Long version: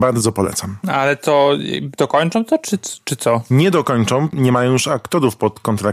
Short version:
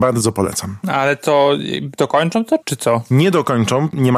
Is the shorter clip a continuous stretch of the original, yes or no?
no